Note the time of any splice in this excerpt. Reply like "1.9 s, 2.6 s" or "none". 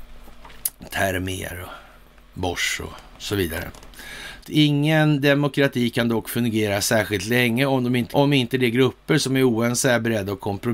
4.4 s, 8.1 s